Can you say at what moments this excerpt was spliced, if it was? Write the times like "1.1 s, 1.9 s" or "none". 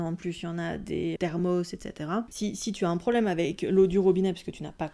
1.2 s, 2.3 s